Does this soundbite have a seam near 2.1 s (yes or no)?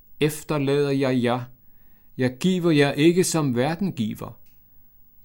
yes